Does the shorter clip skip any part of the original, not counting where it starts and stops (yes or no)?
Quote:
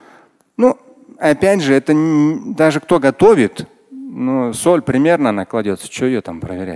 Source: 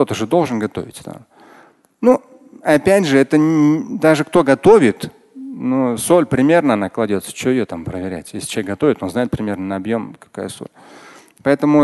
no